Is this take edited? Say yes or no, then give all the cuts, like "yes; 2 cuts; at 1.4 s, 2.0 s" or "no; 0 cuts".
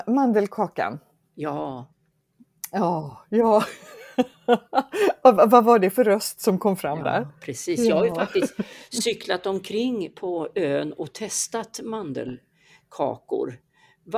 no; 0 cuts